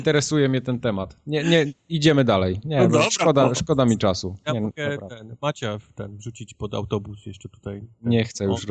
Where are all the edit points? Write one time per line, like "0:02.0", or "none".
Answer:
none